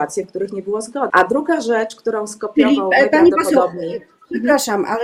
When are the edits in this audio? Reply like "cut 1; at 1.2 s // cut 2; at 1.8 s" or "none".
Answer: cut 1; at 1.1 s